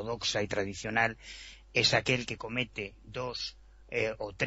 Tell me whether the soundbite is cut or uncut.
uncut